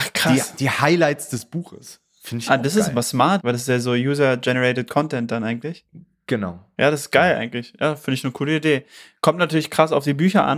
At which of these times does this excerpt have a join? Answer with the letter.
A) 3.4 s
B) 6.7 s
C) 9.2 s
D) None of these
A